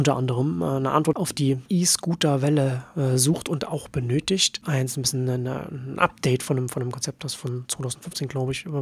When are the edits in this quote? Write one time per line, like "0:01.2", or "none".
0:04.6